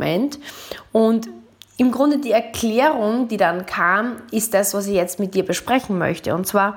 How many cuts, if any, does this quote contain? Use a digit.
0